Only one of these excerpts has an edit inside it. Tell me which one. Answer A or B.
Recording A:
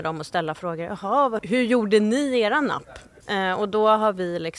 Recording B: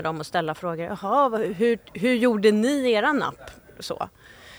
A